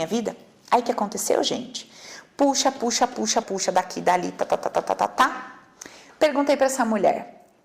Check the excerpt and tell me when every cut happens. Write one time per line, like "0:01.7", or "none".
0:03.4

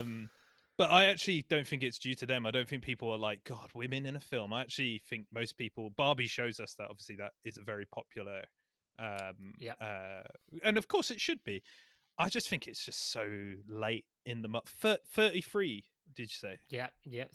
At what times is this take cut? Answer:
none

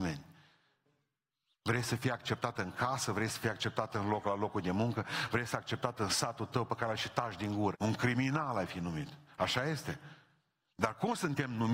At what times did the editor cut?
0:07.7

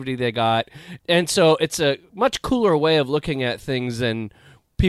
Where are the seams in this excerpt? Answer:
0:01.0

